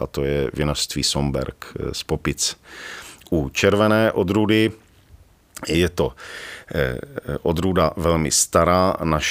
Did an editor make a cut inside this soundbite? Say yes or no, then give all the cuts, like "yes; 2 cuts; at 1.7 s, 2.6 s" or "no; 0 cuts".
no; 0 cuts